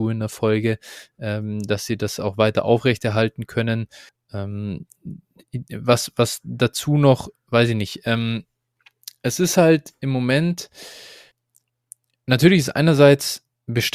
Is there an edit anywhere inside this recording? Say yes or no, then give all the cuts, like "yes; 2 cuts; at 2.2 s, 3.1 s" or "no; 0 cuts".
no; 0 cuts